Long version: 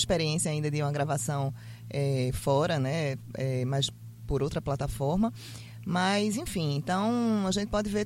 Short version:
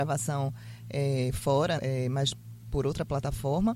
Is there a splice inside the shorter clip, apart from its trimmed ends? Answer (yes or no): yes